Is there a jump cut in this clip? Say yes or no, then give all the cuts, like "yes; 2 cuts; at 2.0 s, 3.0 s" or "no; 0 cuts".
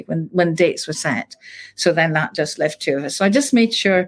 no; 0 cuts